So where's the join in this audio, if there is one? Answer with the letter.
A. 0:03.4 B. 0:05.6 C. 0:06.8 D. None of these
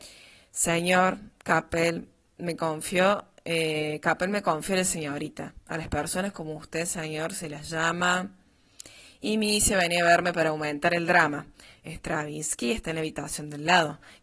D